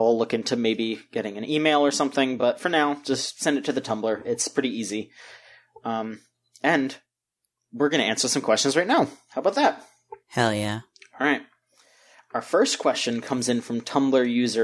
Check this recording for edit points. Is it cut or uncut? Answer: uncut